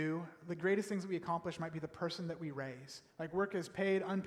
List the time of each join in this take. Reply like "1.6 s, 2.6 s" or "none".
none